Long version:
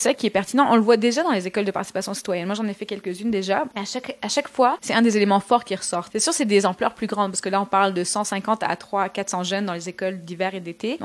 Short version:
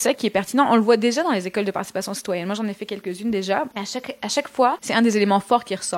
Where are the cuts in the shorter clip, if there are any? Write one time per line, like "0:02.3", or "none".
none